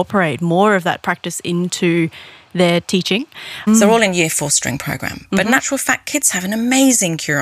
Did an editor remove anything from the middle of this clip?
yes; 1 cut; at 3.7 s

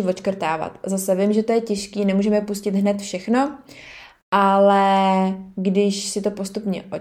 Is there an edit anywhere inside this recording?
no; 0 cuts

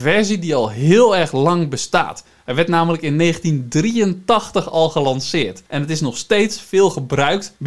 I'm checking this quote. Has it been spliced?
no; 0 cuts

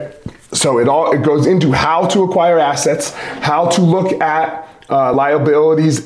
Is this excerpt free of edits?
yes; 0 cuts

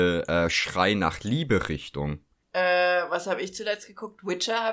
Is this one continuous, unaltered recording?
no; 1 cut; at 2.4 s

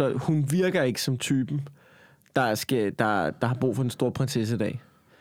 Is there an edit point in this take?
no; 0 cuts

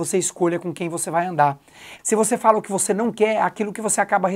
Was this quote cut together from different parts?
yes; 1 cut; at 2.0 s

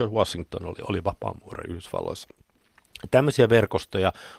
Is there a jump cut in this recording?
no; 0 cuts

